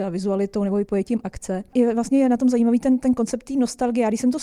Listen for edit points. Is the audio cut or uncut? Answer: uncut